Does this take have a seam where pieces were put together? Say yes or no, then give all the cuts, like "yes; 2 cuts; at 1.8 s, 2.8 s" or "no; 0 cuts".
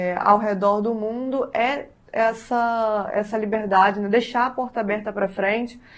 no; 0 cuts